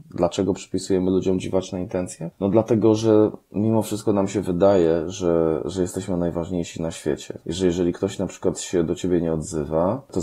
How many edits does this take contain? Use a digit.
0